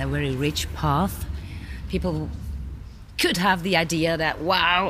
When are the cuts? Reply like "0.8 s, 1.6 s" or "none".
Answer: none